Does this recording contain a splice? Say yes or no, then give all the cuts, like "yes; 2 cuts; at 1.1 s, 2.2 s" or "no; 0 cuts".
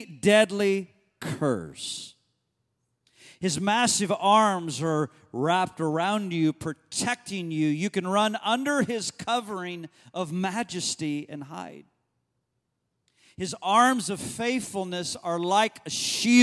no; 0 cuts